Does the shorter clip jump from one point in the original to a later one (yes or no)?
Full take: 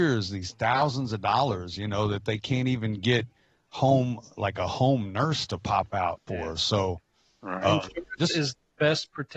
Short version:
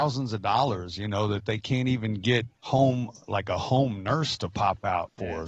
yes